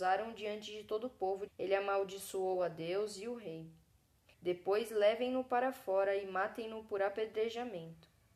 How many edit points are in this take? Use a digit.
2